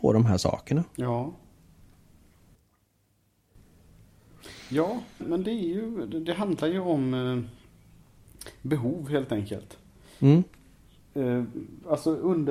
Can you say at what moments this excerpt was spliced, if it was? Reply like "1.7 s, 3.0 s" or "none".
5.2 s